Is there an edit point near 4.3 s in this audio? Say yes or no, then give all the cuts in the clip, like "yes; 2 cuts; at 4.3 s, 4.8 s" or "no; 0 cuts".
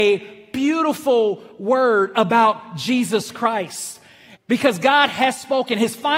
yes; 1 cut; at 4.3 s